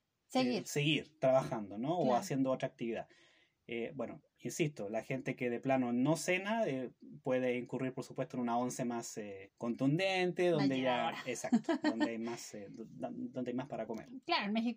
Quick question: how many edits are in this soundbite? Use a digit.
1